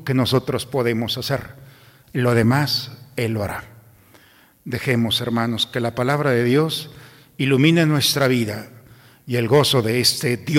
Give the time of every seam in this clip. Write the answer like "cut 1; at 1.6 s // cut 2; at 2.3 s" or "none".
none

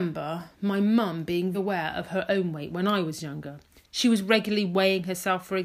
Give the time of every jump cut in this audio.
cut 1; at 1.5 s // cut 2; at 3.8 s

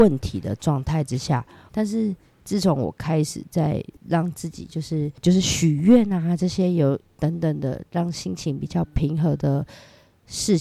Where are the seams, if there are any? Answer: cut 1; at 1.7 s

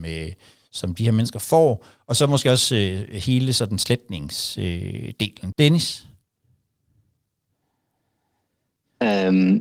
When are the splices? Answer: cut 1; at 5.5 s

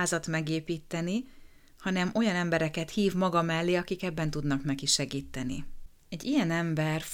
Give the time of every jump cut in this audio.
none

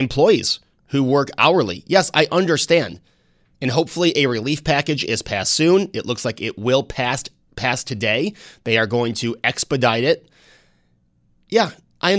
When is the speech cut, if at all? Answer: none

